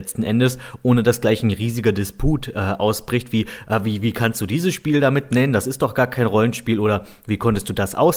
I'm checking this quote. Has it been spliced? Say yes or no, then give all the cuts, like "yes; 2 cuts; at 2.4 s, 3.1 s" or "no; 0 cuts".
no; 0 cuts